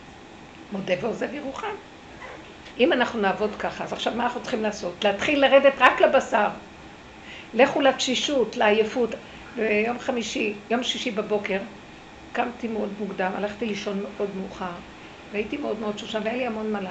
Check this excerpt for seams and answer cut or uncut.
cut